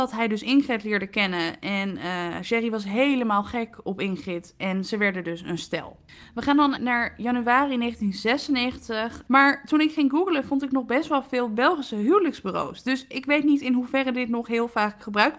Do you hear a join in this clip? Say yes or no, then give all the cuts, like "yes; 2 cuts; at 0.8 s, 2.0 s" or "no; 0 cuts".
yes; 2 cuts; at 6.8 s, 9.3 s